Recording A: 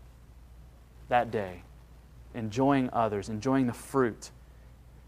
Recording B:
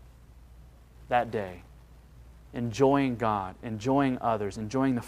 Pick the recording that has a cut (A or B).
A